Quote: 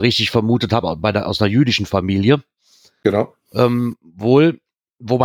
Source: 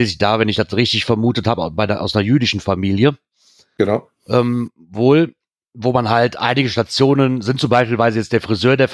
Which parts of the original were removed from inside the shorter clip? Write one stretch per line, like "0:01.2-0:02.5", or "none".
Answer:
none

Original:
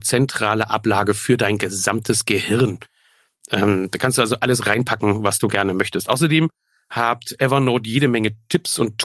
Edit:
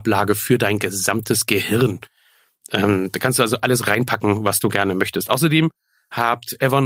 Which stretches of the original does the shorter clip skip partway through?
none

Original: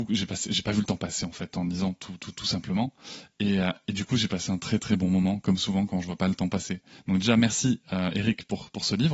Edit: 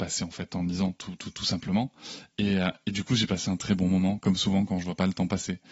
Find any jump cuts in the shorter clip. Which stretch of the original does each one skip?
0:04.6-0:04.8

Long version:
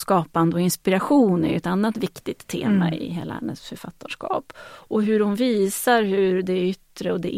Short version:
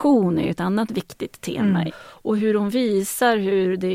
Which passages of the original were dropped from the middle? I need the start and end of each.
0:02.9-0:04.5

